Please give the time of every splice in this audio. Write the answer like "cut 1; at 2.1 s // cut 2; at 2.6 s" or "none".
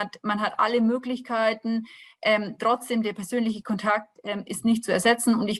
none

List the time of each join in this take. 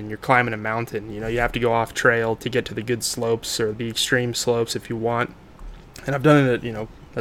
cut 1; at 2.4 s // cut 2; at 3.7 s

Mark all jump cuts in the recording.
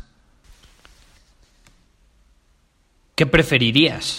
none

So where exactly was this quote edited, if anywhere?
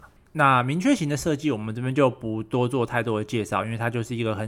none

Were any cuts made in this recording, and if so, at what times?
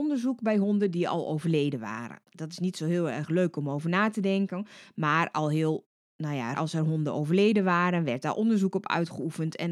cut 1; at 6.5 s

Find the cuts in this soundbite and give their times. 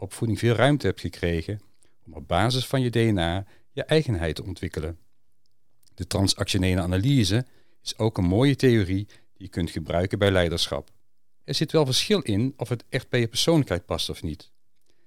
cut 1; at 11.4 s

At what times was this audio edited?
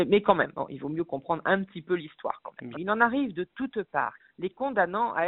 cut 1; at 2.7 s // cut 2; at 4.2 s

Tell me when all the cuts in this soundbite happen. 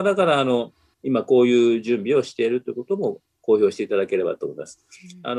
cut 1; at 0.9 s

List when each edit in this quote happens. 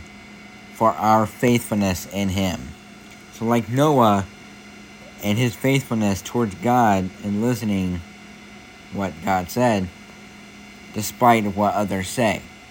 cut 1; at 8.9 s // cut 2; at 10.9 s

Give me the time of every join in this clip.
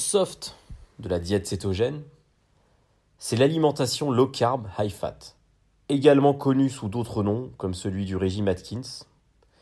cut 1; at 5.8 s

